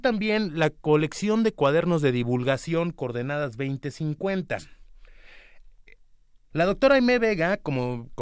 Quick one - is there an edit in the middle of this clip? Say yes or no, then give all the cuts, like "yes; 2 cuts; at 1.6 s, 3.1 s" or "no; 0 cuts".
yes; 1 cut; at 6.5 s